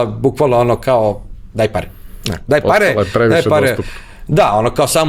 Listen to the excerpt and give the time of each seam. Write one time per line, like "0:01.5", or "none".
none